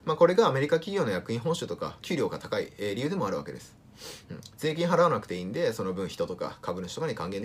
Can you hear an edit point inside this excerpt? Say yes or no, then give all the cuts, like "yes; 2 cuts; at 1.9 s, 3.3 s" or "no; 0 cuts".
yes; 1 cut; at 2.0 s